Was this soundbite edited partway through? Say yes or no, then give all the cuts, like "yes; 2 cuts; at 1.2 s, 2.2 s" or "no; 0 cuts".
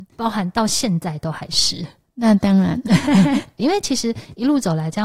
yes; 1 cut; at 3.6 s